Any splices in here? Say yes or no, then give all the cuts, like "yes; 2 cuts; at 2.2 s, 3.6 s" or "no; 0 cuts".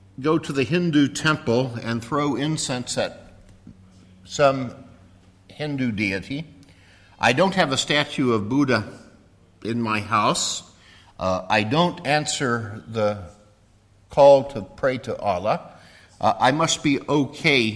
no; 0 cuts